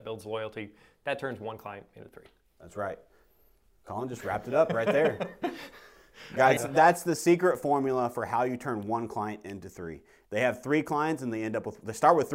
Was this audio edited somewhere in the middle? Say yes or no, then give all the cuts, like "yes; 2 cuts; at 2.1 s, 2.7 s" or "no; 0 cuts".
yes; 2 cuts; at 6.6 s, 10.2 s